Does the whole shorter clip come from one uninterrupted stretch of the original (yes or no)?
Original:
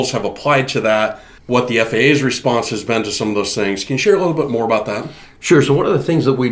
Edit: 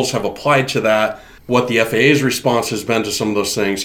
yes